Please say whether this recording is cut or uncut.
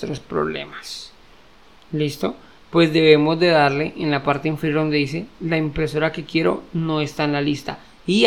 cut